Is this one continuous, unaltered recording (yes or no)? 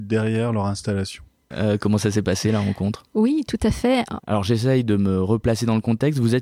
no